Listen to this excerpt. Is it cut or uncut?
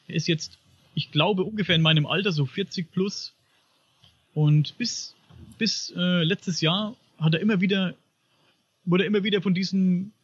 uncut